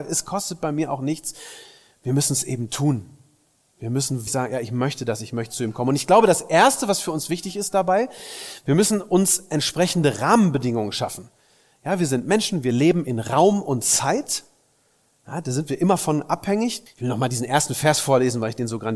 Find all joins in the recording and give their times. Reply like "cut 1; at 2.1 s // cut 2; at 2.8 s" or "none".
cut 1; at 4.3 s // cut 2; at 16.9 s